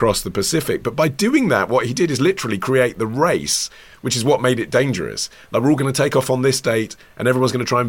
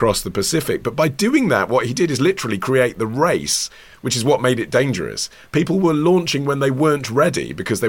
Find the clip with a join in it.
second; 1 cut; at 5.5 s

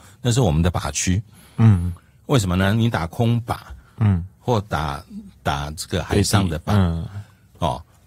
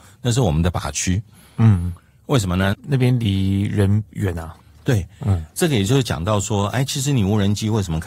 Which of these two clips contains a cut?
second; 1 cut; at 2.7 s

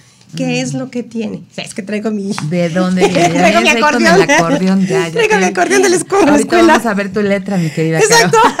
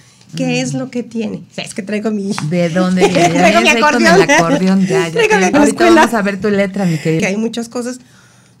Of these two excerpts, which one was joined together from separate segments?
second; 2 cuts; at 5.5 s, 7.2 s

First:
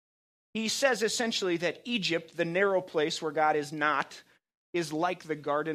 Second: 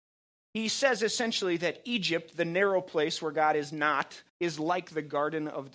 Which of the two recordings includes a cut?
second; 1 cut; at 4.3 s

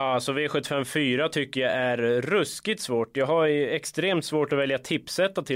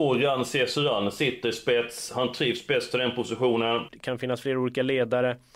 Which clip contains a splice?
second; 1 cut; at 3.9 s

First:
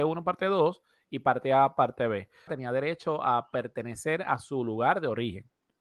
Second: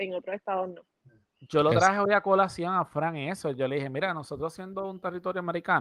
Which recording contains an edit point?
first; 1 cut; at 2.5 s

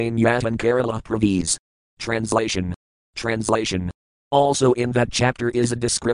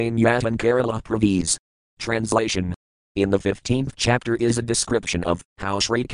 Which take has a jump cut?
first; 1 cut; at 3.0 s

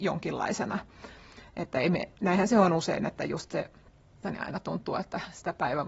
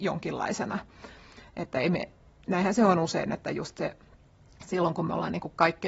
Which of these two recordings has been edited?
first; 2 cuts; at 2.2 s, 4.2 s

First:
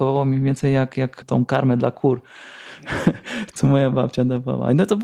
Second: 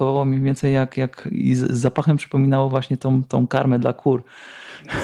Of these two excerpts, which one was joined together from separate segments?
first; 2 cuts; at 1.2 s, 3.5 s

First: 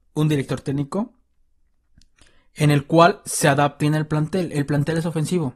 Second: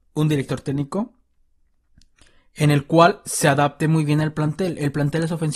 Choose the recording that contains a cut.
first; 1 cut; at 3.8 s

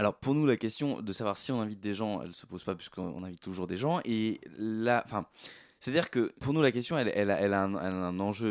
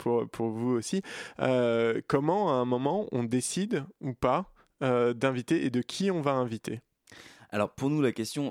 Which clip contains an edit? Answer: first; 1 cut; at 6.4 s

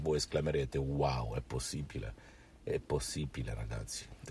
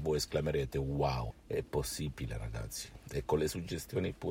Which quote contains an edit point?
second; 1 cut; at 1.3 s

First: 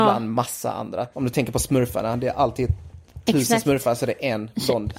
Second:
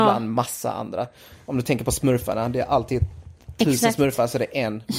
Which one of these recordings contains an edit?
first; 1 cut; at 1.1 s

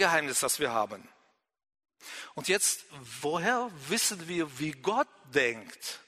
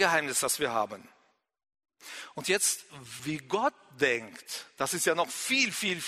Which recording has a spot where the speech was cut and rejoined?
second; 1 cut; at 3.2 s

